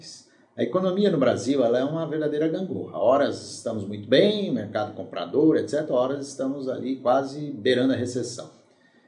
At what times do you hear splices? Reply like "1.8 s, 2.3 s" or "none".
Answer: none